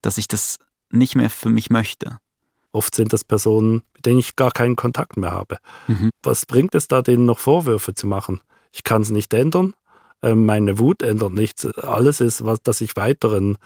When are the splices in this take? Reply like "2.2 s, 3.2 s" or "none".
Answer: 2.7 s